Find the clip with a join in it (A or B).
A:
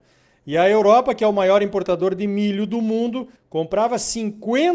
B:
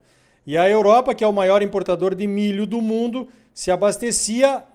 A